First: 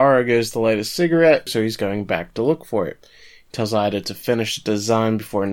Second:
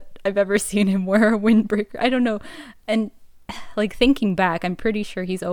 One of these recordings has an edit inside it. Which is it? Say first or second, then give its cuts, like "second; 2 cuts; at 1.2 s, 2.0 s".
first; 1 cut; at 1.5 s